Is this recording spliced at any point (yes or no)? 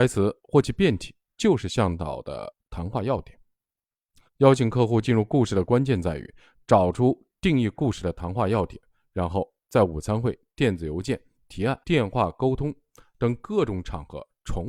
yes